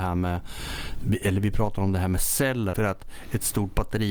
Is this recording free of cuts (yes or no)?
no